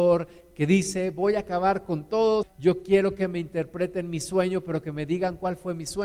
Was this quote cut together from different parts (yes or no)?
yes